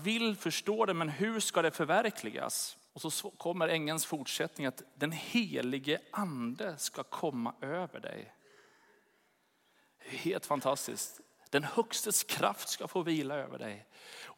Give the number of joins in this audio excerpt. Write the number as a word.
one